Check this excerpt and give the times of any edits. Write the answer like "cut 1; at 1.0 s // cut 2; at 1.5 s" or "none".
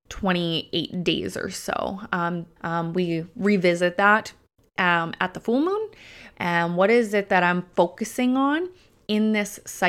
cut 1; at 2.6 s // cut 2; at 6.3 s